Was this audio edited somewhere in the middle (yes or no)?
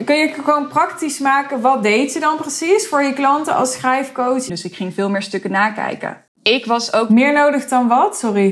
yes